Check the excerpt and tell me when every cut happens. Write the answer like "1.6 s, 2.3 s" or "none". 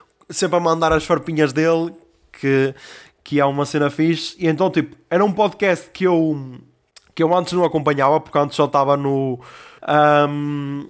9.8 s